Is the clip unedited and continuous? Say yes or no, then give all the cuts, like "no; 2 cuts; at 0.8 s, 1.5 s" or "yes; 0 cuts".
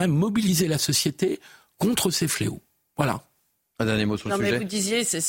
yes; 0 cuts